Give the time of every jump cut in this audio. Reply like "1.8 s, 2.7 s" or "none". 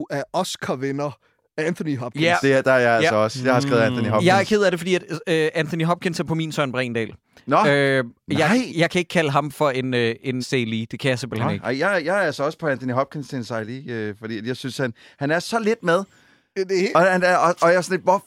10.4 s